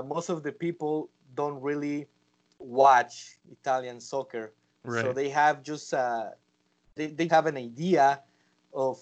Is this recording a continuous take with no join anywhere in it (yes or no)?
no